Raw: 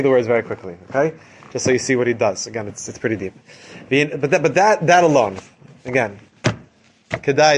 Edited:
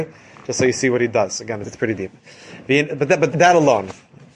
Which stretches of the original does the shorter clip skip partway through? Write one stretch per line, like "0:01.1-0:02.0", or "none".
0:02.7-0:02.9
0:04.5-0:04.8